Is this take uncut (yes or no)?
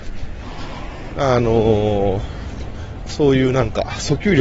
no